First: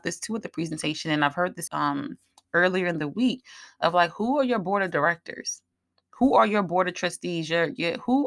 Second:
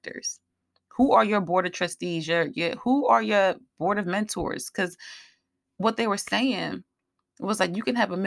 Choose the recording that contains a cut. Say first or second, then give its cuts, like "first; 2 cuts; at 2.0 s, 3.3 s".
first; 1 cut; at 1.7 s